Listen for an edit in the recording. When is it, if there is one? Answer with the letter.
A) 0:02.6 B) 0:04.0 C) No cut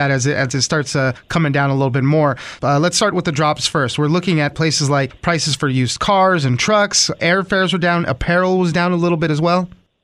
A